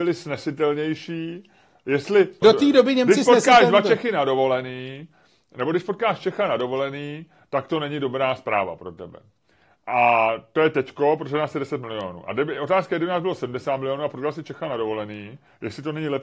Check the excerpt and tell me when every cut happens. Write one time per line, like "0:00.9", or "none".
0:02.4